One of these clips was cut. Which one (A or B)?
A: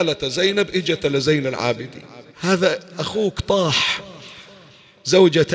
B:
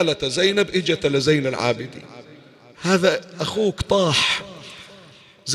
A